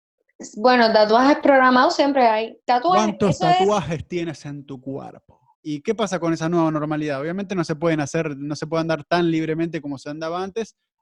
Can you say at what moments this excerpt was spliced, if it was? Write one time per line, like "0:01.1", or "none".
0:05.5